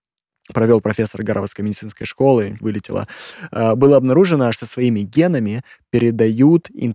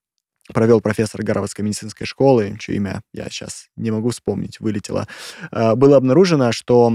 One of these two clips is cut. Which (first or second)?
first